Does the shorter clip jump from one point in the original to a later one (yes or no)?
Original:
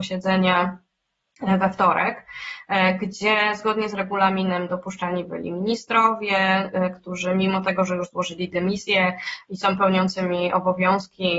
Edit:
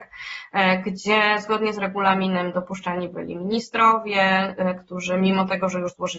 no